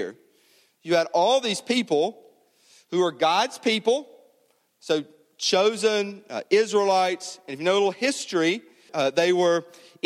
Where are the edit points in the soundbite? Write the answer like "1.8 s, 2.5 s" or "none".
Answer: 8.9 s